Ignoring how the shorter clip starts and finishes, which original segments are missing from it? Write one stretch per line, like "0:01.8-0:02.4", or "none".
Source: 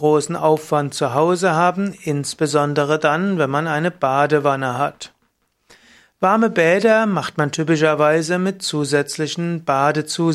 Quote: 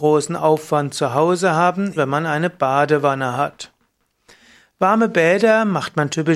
0:02.0-0:03.4